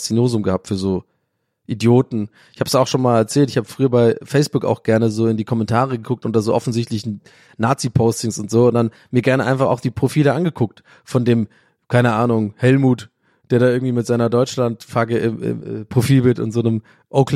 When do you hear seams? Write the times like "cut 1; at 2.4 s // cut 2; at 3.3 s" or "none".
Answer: cut 1; at 15.6 s